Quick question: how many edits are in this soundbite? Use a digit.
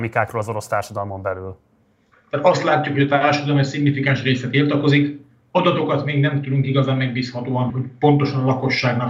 2